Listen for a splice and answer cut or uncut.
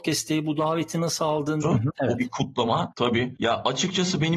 cut